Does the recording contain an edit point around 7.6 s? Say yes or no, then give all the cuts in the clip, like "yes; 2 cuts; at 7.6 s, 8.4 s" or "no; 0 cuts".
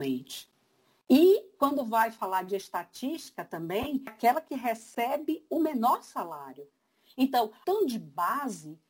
yes; 1 cut; at 7.6 s